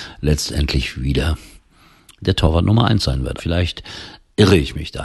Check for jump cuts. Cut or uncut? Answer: cut